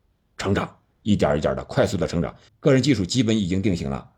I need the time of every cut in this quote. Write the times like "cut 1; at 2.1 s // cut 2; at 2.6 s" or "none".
cut 1; at 2.5 s